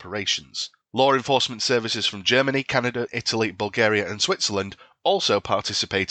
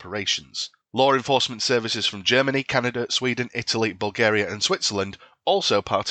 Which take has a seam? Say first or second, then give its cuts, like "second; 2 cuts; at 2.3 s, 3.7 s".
first; 1 cut; at 3.1 s